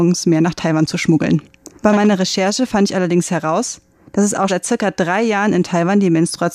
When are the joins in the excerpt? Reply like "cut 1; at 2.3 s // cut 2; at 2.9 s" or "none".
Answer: cut 1; at 1.8 s // cut 2; at 4.5 s